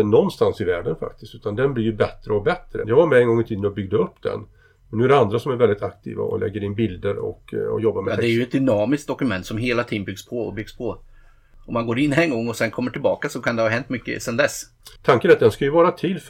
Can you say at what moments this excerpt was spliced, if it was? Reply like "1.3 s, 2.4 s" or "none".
2.8 s, 15.0 s